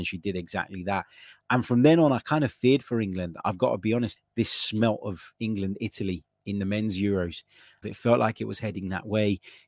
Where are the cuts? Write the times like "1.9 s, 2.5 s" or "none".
4.2 s, 7.8 s